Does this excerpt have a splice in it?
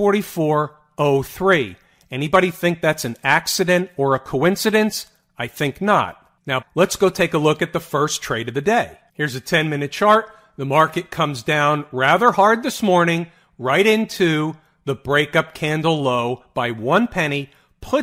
yes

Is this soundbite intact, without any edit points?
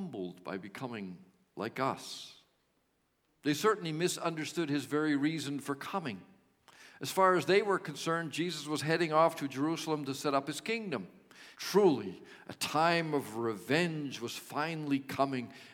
no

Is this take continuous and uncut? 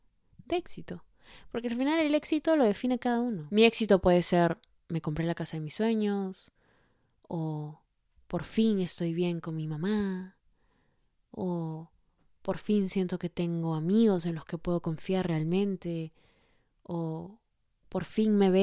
yes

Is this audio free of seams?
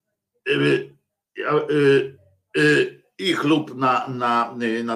yes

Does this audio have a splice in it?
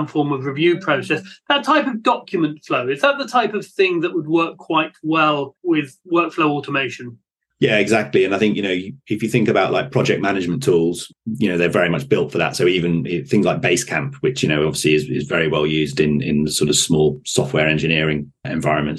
no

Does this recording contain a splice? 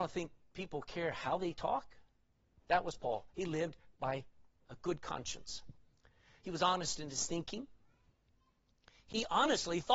yes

